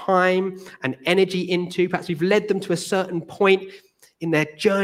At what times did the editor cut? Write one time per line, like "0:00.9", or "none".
none